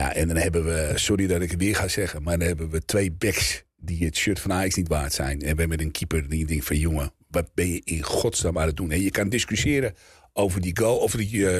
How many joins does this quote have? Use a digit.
0